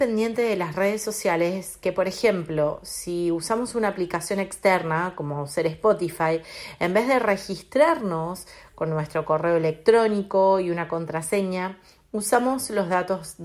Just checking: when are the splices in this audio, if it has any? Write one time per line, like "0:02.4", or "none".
none